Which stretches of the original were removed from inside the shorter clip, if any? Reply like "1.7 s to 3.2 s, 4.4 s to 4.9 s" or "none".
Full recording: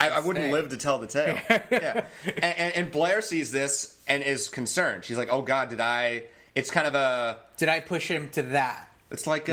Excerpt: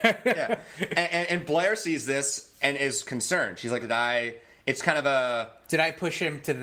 5.3 s to 5.7 s